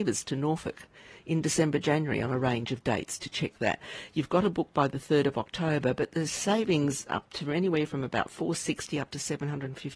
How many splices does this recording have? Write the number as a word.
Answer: zero